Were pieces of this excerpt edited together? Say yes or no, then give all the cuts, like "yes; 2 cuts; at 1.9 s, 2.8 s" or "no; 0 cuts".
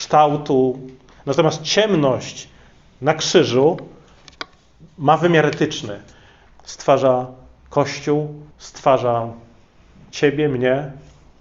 yes; 2 cuts; at 6.5 s, 8.5 s